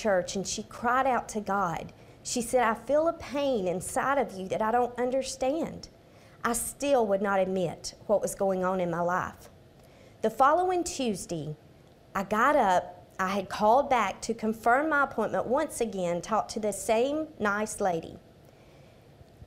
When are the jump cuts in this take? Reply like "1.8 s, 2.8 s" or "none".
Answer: 16.7 s